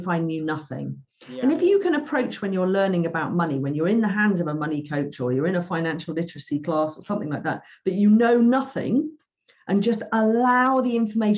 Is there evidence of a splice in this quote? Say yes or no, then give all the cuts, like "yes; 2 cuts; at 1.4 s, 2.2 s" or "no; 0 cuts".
no; 0 cuts